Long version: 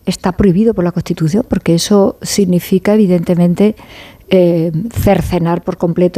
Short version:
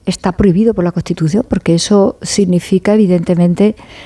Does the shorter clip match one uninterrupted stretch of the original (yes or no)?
yes